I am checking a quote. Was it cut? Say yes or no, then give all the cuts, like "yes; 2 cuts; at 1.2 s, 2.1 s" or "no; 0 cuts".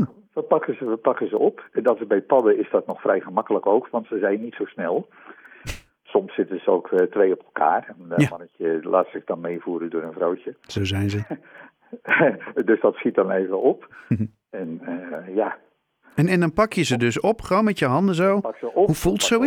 no; 0 cuts